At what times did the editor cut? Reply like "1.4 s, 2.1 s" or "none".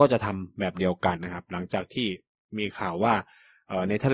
1.2 s